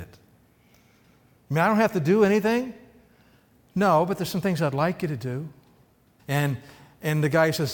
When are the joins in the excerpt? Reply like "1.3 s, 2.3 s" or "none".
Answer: 6.2 s